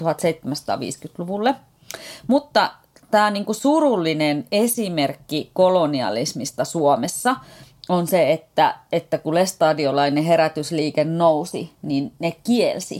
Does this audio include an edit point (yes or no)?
no